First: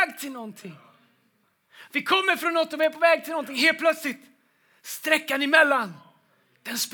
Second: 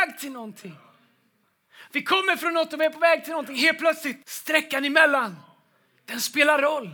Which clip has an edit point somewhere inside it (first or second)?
second